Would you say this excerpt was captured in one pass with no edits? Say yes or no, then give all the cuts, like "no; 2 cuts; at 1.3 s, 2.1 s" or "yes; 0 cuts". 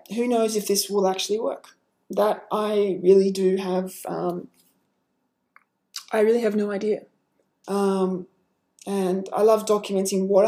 no; 1 cut; at 7.6 s